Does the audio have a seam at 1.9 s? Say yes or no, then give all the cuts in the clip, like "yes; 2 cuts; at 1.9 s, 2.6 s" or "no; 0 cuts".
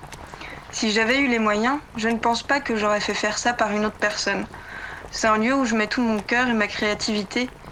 no; 1 cut; at 5.1 s